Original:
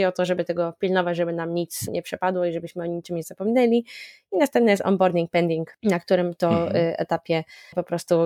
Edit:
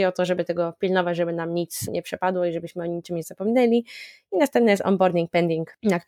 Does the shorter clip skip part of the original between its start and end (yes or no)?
no